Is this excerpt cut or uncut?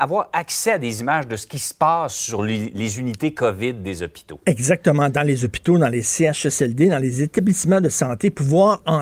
uncut